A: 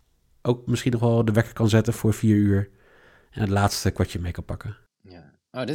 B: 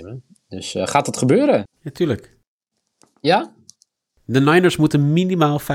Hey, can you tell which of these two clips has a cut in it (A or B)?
B